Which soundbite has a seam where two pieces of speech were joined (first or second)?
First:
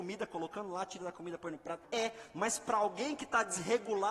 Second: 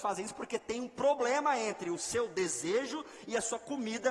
first